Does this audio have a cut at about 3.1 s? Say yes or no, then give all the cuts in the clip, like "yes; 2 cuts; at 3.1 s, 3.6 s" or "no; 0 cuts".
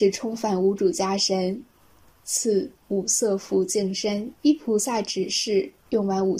no; 1 cut; at 4.4 s